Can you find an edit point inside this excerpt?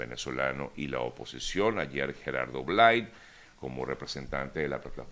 no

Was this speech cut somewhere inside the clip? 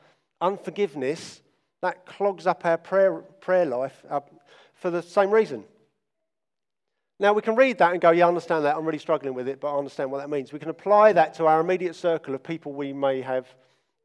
no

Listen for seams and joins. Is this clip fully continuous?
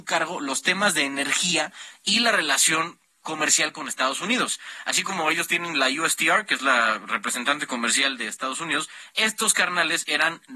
yes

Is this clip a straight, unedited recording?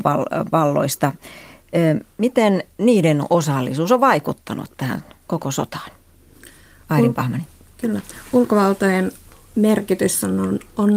yes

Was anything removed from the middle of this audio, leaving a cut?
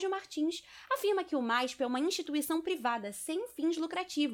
no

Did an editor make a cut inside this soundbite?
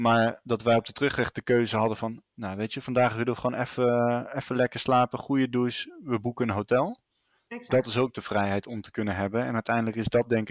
no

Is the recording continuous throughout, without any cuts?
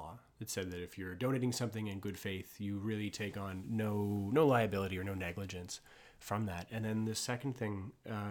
yes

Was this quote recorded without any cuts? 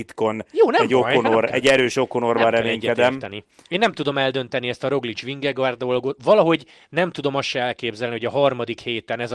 yes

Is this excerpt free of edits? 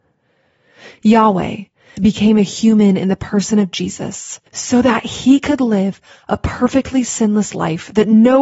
no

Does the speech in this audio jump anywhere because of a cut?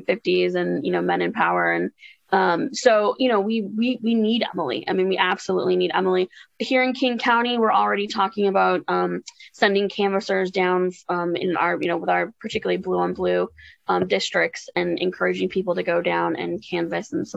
no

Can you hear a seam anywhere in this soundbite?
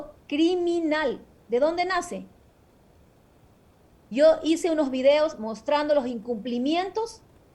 yes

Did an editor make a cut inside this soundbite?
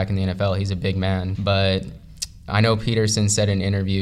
yes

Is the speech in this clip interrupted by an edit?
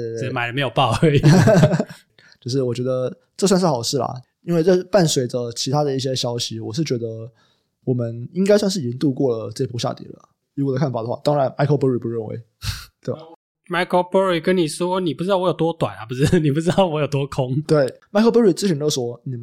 no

